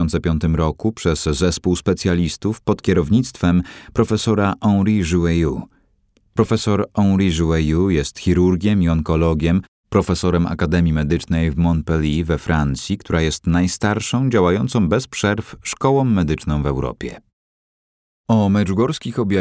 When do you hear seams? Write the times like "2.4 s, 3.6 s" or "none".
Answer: 18.1 s